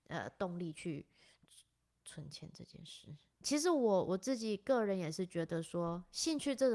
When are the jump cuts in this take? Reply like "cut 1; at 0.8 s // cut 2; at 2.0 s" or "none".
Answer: cut 1; at 3.3 s